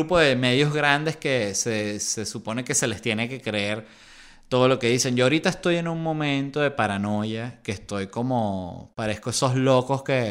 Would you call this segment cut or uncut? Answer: uncut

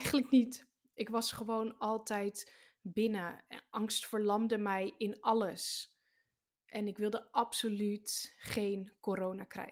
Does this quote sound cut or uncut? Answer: uncut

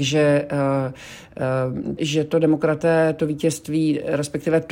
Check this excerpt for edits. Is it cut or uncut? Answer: cut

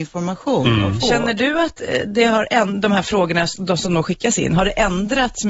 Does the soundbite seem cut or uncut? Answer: uncut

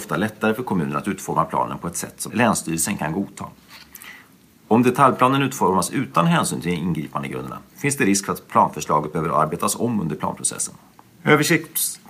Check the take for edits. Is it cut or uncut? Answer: cut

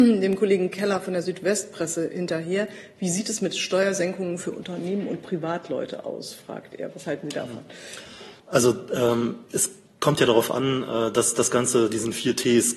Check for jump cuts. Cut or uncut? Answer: cut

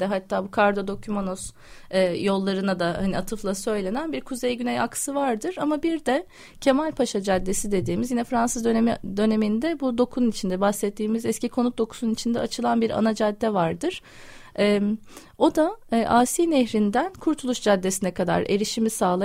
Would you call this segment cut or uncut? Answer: uncut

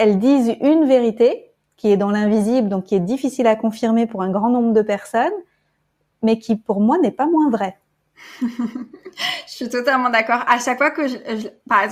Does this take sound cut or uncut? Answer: uncut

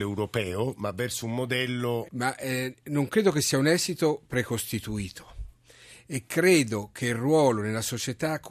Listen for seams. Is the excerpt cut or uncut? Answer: cut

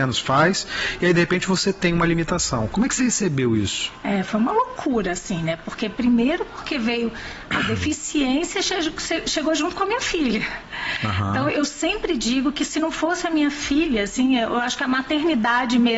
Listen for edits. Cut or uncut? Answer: uncut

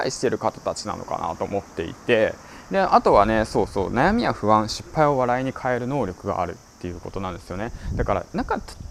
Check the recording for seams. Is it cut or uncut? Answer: uncut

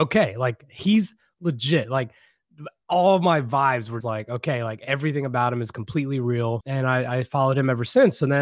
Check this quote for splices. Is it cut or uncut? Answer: cut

